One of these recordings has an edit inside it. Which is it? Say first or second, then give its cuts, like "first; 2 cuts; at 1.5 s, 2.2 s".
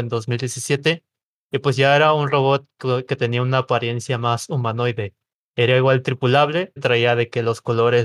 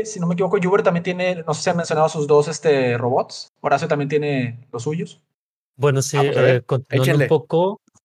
first; 1 cut; at 6.8 s